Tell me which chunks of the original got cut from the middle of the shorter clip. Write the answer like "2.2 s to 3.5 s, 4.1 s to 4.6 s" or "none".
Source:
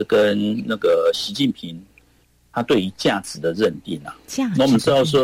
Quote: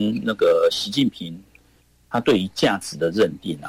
none